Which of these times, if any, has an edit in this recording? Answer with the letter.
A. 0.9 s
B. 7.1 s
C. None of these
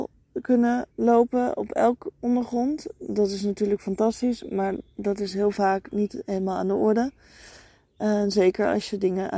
A